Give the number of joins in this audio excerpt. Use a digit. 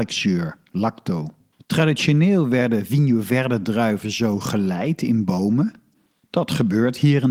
1